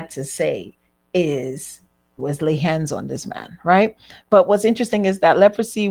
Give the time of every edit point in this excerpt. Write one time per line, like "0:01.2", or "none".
0:02.2